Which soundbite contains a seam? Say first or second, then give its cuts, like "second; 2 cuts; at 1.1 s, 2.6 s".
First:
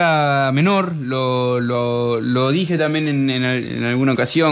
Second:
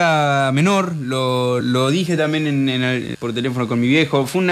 second; 2 cuts; at 1.6 s, 3.1 s